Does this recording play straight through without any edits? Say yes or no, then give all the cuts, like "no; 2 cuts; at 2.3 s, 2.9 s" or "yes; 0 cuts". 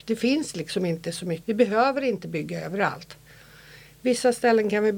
no; 1 cut; at 1.4 s